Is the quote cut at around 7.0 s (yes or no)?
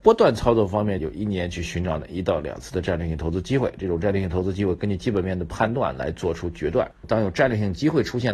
yes